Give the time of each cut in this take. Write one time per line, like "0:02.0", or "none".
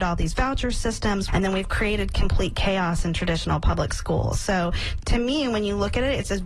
0:01.3